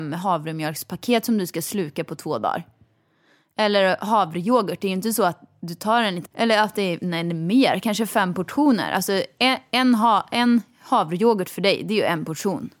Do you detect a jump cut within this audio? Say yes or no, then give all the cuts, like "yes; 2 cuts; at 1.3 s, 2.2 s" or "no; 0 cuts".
yes; 1 cut; at 6.2 s